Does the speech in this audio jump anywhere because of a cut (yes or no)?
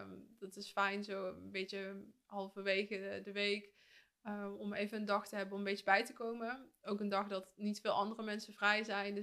no